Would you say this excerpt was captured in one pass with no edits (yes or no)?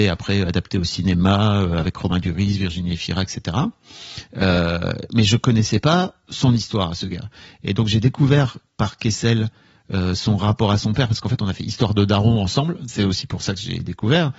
yes